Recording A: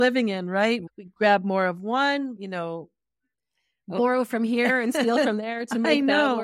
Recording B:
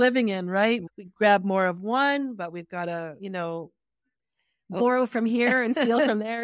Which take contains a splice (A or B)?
A